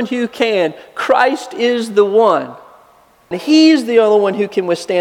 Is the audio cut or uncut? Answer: cut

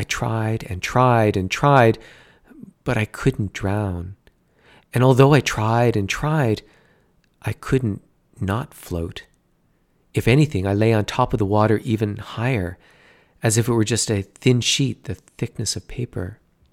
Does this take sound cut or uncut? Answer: uncut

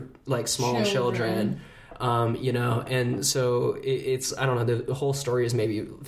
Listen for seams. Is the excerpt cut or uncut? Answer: uncut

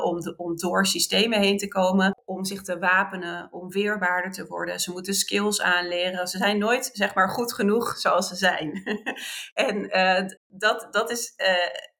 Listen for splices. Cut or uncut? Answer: cut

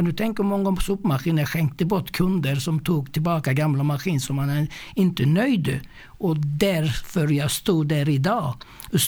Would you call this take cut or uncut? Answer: uncut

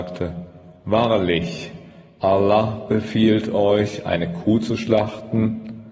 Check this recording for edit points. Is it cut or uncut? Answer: uncut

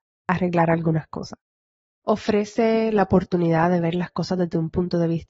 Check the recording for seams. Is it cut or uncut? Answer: cut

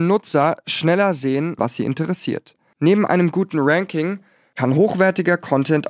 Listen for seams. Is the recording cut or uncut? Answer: cut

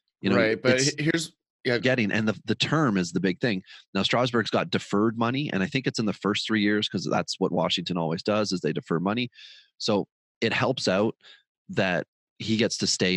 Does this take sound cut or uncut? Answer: cut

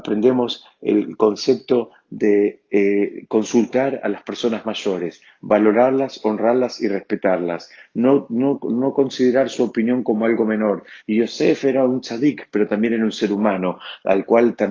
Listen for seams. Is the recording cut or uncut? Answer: cut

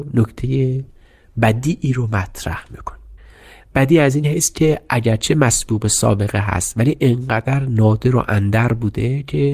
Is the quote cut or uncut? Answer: uncut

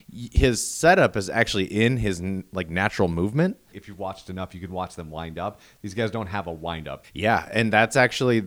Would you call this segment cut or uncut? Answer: cut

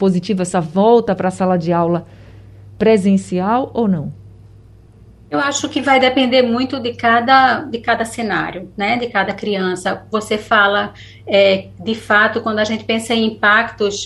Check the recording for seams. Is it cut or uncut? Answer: uncut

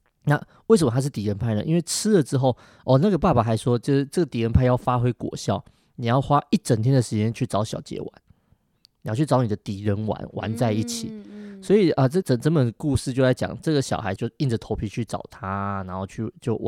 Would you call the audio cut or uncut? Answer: cut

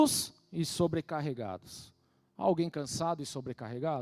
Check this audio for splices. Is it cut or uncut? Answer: uncut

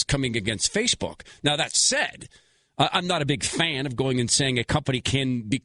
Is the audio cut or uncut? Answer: uncut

